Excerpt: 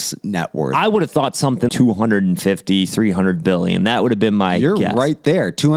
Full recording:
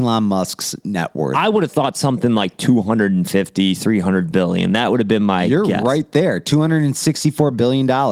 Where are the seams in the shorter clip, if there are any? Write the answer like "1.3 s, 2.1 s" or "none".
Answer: 1.7 s

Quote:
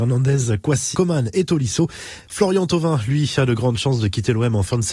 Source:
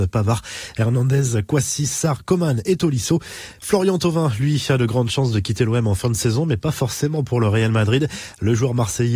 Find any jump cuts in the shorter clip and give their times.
0.9 s

